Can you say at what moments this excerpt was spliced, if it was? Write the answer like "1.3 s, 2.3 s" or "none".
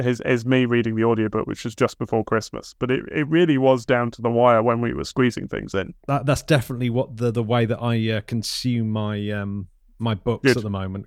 none